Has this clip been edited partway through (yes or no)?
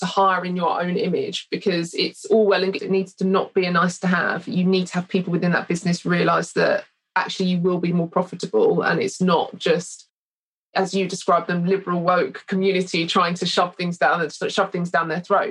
yes